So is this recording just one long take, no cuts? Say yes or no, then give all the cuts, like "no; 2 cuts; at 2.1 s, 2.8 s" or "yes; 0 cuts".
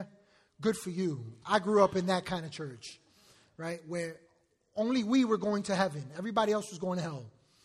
yes; 0 cuts